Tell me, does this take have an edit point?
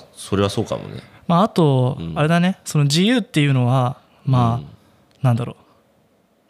no; 0 cuts

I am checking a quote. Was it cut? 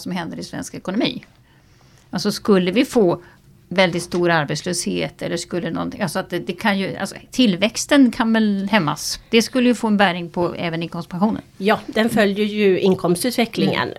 no; 0 cuts

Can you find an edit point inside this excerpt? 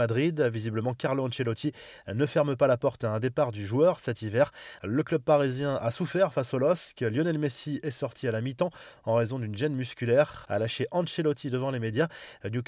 yes; 2 cuts; at 4.8 s, 10.4 s

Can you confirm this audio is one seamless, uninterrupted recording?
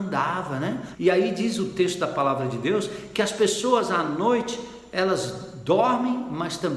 no; 1 cut; at 0.9 s

